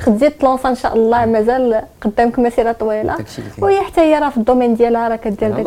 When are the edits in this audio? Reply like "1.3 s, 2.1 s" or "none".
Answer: none